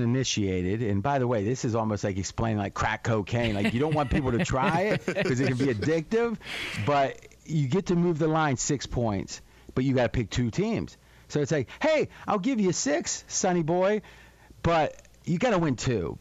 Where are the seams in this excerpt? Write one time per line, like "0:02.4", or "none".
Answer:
none